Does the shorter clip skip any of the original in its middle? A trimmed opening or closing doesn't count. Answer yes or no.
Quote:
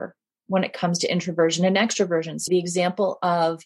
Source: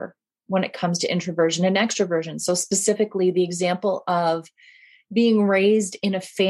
yes